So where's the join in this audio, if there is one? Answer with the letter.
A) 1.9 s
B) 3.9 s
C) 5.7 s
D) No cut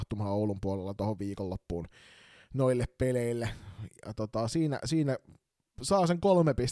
D